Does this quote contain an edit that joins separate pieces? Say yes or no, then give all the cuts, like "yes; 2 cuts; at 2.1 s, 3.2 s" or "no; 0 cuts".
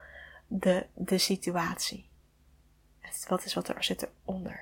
no; 0 cuts